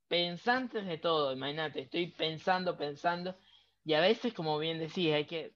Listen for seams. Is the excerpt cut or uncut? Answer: uncut